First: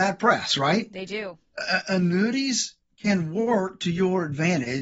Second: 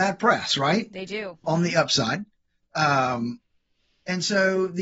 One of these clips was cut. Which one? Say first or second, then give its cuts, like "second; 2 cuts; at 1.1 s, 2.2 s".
second; 1 cut; at 1.4 s